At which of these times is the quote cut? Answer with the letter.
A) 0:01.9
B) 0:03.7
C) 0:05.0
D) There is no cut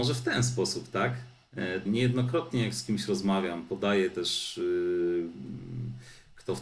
A